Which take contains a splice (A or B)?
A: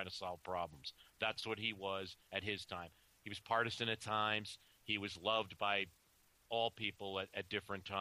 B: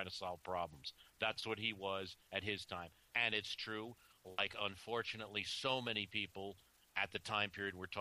B